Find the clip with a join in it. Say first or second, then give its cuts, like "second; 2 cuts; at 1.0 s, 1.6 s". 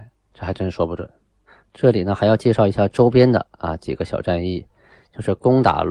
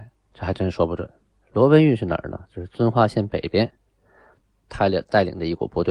second; 2 cuts; at 1.4 s, 4.7 s